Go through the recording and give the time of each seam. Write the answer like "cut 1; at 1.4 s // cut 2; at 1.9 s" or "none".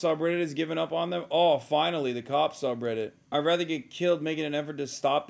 none